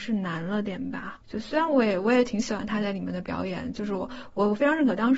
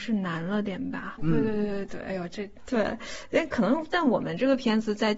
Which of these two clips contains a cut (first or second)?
second